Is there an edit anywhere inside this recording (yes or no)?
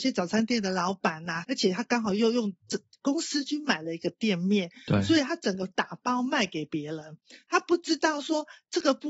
yes